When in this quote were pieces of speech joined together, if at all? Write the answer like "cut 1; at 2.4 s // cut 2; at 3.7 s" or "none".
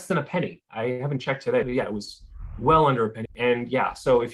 cut 1; at 1.6 s // cut 2; at 3.3 s